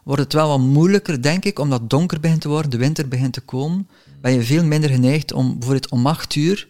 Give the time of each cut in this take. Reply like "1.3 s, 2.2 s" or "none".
none